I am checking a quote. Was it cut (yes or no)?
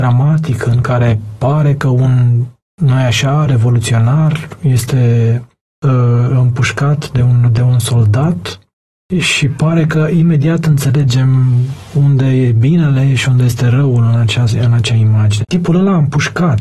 yes